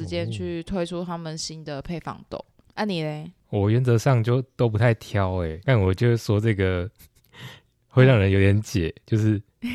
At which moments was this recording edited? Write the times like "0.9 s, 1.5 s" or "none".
3.4 s, 5.6 s